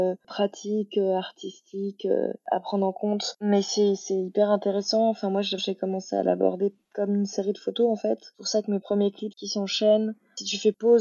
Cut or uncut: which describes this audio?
cut